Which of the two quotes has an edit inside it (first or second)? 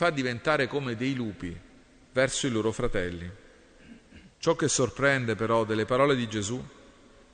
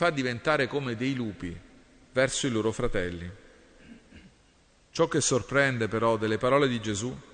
first